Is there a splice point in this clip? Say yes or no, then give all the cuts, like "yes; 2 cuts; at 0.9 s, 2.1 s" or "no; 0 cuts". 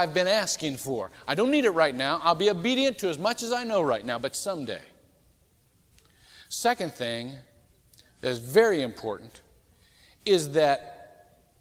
no; 0 cuts